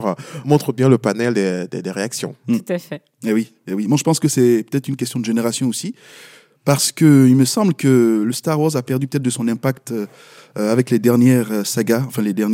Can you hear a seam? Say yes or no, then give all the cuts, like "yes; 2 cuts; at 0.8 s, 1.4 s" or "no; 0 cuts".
no; 0 cuts